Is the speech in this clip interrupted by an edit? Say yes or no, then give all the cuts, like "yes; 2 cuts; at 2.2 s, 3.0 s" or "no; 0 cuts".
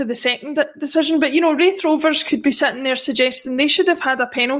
no; 0 cuts